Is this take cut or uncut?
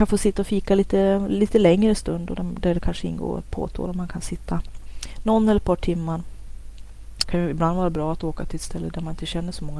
cut